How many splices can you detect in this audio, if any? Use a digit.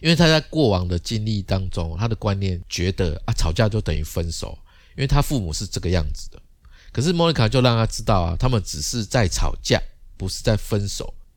0